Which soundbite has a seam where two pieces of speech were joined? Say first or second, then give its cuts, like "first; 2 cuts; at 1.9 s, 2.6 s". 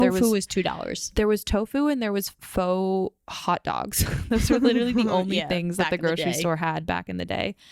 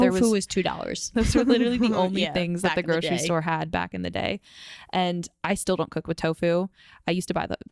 second; 1 cut; at 1.1 s